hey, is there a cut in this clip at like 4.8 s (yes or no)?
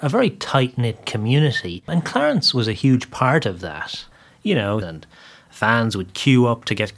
yes